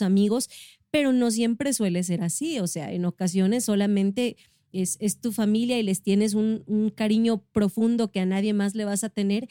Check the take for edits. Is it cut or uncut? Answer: uncut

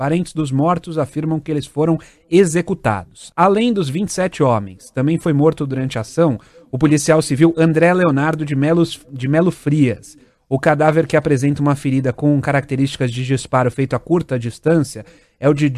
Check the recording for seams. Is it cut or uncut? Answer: cut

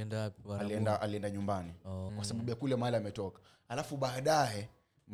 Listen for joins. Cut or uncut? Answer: cut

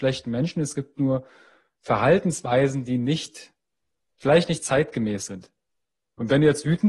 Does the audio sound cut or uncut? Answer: uncut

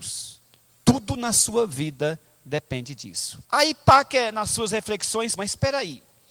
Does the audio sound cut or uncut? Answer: cut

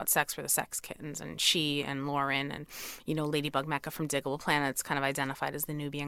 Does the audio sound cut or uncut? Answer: uncut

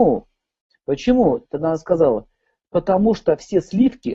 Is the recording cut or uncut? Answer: uncut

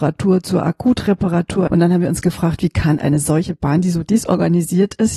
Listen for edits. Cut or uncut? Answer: cut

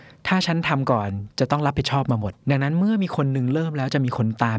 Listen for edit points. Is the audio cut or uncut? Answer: cut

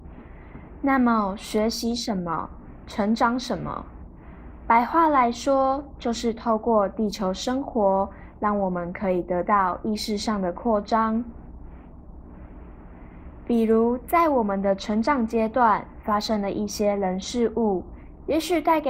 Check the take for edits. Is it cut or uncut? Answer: uncut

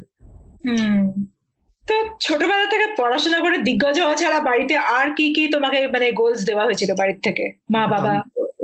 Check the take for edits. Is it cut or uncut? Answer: uncut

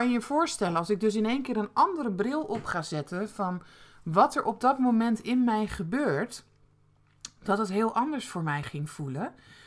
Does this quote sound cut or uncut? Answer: uncut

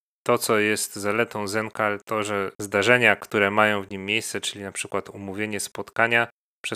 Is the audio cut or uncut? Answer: cut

